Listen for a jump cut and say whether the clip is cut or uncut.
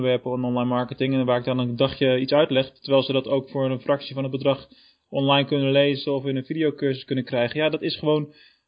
uncut